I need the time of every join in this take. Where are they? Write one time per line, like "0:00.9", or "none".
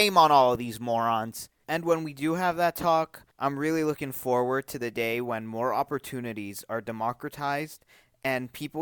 0:01.6
0:03.3

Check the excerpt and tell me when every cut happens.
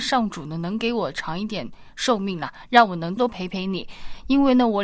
0:03.2

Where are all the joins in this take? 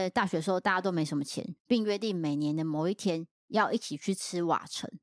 0:01.6

